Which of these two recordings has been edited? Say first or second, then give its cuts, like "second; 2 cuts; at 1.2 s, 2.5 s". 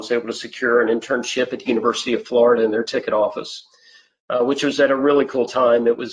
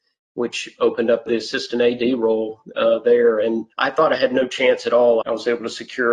second; 3 cuts; at 1.3 s, 3.7 s, 5.2 s